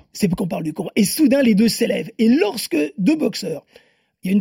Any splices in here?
no; 0 cuts

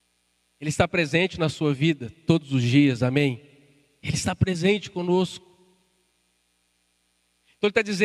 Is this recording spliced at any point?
no; 0 cuts

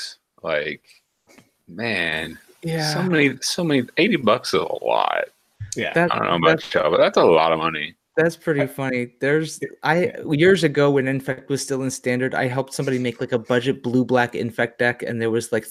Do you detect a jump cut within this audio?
no; 0 cuts

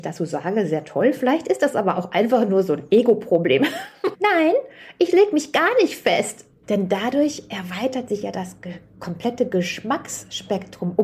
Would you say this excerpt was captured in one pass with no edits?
no; 2 cuts; at 4.1 s, 6.6 s

